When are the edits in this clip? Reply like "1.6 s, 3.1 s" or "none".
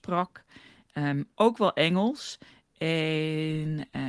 none